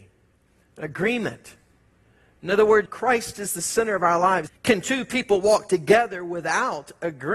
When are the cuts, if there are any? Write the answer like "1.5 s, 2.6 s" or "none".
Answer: 2.9 s, 4.5 s

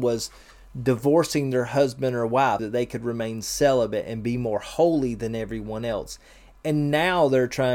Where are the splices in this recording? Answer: 2.6 s

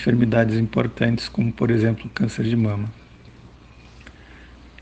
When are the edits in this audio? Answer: none

